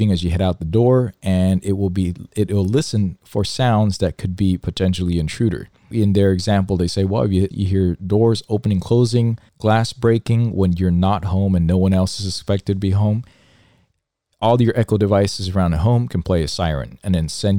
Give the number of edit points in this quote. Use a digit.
2